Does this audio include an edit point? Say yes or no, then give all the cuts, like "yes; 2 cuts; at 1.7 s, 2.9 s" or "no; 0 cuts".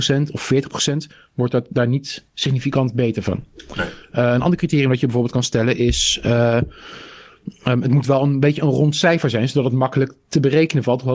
no; 0 cuts